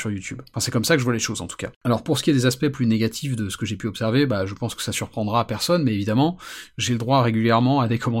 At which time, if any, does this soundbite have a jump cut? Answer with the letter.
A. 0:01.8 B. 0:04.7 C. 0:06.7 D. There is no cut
A